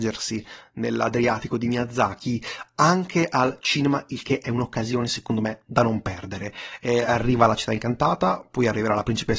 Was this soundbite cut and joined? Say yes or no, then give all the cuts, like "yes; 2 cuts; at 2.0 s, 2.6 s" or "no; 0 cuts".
no; 0 cuts